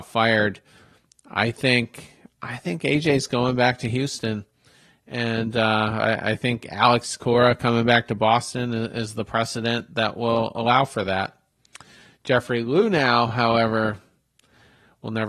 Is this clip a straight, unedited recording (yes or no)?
yes